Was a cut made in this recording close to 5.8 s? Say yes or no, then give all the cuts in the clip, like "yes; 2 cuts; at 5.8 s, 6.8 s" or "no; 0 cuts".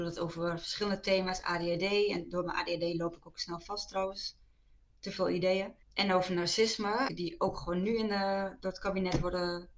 yes; 2 cuts; at 5.8 s, 7.1 s